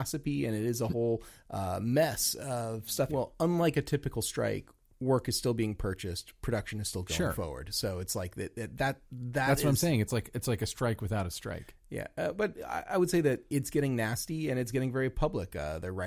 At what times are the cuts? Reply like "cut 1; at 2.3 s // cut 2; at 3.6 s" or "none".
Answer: cut 1; at 3.1 s